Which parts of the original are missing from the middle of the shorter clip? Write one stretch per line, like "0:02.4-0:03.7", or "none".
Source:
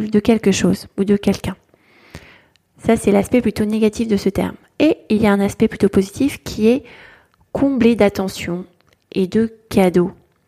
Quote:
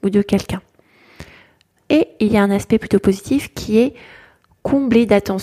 0:02.7-0:04.7